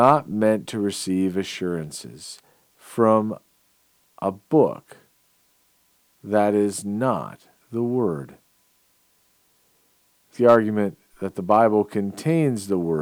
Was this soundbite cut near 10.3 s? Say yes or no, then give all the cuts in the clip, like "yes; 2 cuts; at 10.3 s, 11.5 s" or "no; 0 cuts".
yes; 1 cut; at 10.3 s